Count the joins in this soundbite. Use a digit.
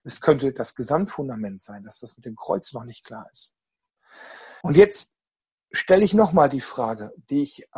1